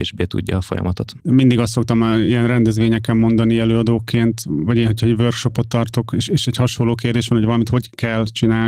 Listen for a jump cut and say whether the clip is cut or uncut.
cut